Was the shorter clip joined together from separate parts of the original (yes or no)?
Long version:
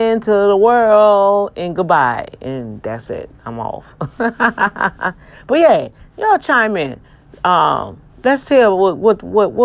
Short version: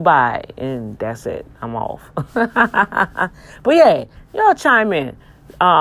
no